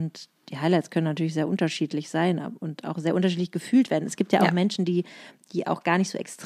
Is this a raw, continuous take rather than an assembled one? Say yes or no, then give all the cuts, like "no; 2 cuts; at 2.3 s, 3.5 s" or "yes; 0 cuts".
yes; 0 cuts